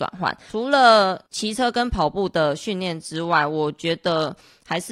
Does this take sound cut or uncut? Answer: cut